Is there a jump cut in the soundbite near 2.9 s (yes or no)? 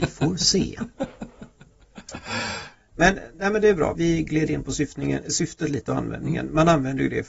yes